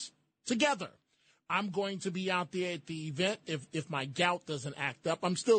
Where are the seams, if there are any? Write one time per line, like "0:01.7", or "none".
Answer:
none